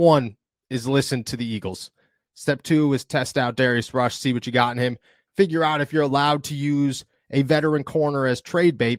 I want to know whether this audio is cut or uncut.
uncut